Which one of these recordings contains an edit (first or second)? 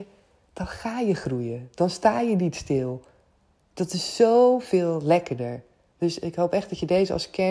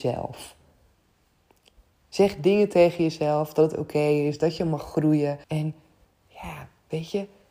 second